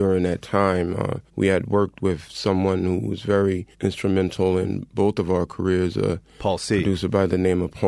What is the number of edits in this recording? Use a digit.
2